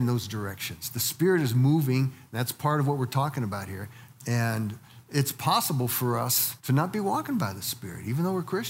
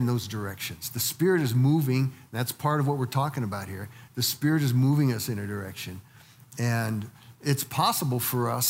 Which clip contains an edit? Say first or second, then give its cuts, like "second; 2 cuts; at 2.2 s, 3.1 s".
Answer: first; 2 cuts; at 4.1 s, 6.6 s